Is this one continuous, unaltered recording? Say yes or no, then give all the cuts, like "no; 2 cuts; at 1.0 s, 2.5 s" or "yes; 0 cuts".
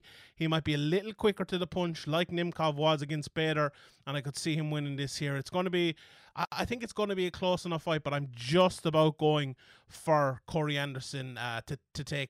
yes; 0 cuts